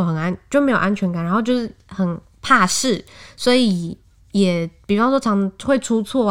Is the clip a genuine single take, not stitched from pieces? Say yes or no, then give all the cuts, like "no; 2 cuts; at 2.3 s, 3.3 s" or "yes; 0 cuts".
yes; 0 cuts